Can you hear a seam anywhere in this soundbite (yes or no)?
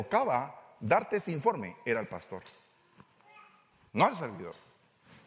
no